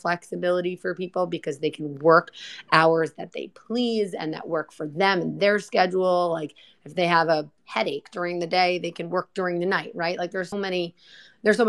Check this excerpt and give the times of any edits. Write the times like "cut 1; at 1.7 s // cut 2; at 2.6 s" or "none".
cut 1; at 7.6 s // cut 2; at 10.5 s